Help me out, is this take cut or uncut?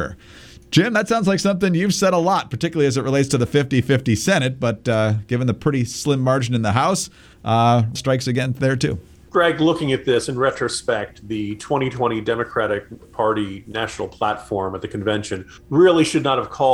cut